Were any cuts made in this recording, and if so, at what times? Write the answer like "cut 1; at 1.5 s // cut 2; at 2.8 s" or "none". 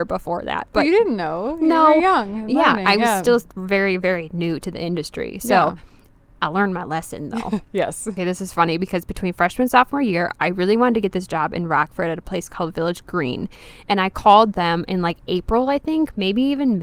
cut 1; at 8.2 s